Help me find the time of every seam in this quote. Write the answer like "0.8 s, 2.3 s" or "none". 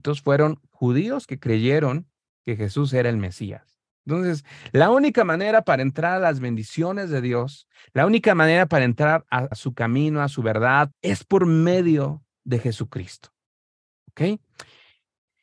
9.5 s, 10.9 s